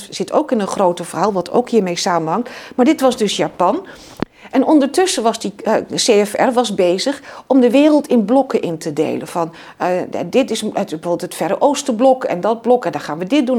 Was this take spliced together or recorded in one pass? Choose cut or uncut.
uncut